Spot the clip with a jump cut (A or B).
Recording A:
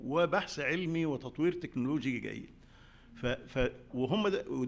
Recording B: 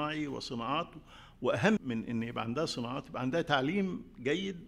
B